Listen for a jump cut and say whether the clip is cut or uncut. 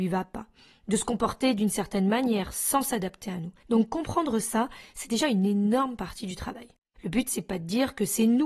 cut